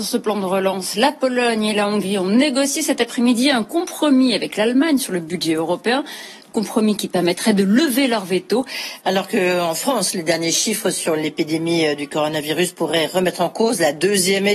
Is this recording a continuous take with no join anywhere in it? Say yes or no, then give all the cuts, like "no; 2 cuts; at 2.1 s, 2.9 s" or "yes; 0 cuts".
no; 1 cut; at 9.0 s